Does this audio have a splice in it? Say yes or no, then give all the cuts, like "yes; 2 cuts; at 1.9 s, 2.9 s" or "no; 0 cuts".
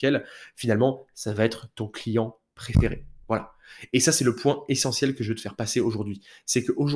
no; 0 cuts